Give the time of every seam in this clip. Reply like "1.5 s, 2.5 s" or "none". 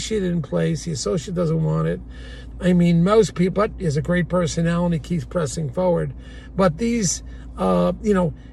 2.5 s, 3.5 s